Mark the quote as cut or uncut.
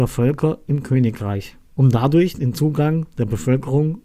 uncut